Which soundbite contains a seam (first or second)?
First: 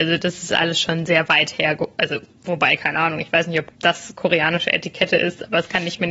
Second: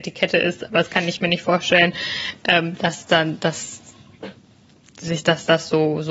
first